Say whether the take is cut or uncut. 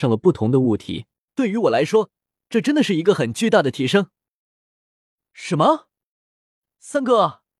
cut